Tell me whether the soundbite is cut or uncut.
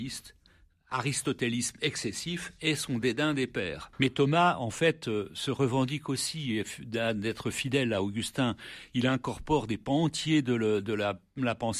cut